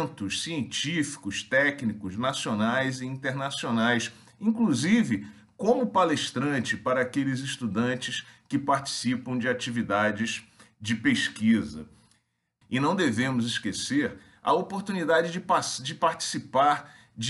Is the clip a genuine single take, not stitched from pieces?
no; 1 cut; at 12.6 s

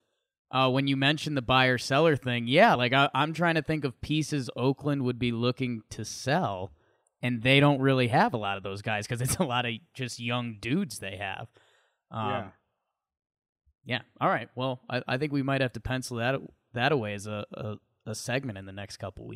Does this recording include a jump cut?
no; 0 cuts

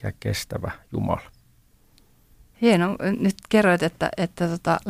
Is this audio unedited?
no; 1 cut; at 2.5 s

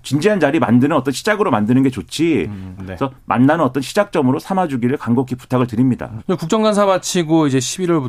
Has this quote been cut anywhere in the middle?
yes; 2 cuts; at 2.8 s, 6.2 s

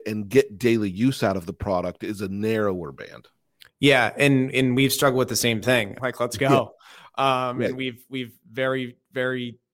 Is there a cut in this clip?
yes; 1 cut; at 6.0 s

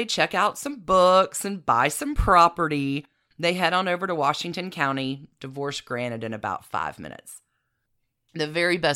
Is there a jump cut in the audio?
no; 0 cuts

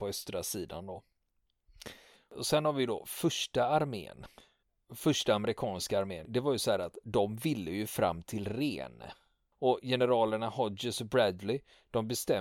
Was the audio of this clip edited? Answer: no; 0 cuts

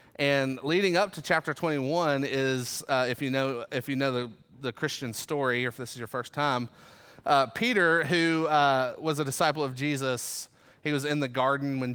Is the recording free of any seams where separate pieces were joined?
yes; 0 cuts

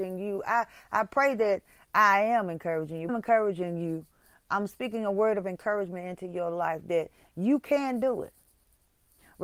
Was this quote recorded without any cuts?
no; 1 cut; at 3.1 s

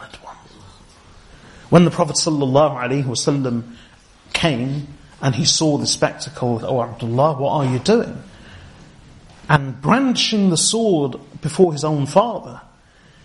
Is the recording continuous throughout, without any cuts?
no; 2 cuts; at 6.6 s, 9.3 s

